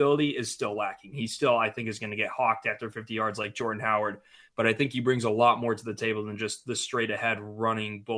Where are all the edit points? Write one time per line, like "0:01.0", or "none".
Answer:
none

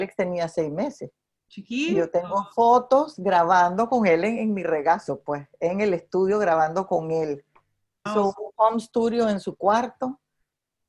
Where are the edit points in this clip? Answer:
0:08.1

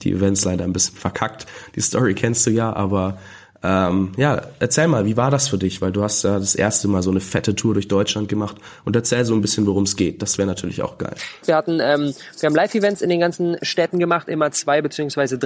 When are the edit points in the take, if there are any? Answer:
0:11.4

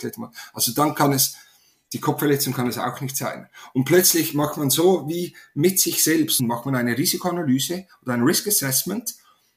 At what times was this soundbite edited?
0:06.4

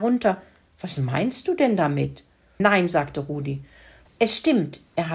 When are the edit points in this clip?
0:04.1

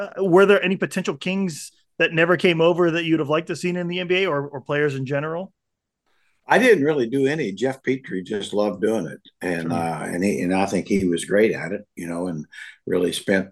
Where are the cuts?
none

